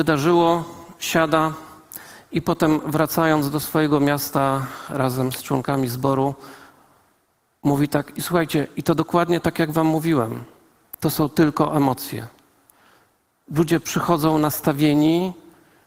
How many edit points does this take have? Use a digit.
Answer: 0